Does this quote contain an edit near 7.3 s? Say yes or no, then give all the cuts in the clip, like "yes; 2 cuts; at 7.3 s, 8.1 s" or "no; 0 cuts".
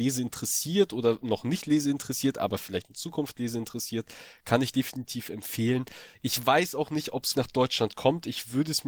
yes; 2 cuts; at 6.1 s, 7.3 s